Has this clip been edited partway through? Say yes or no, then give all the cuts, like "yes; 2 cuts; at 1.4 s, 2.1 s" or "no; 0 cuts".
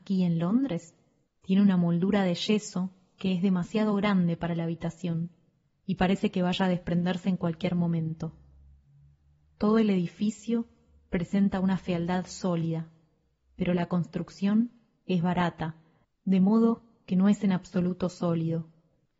yes; 1 cut; at 1.3 s